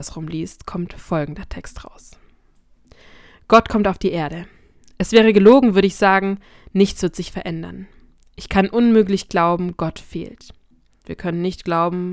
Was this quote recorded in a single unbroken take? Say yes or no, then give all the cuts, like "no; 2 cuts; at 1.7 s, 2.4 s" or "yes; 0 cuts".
no; 1 cut; at 11.0 s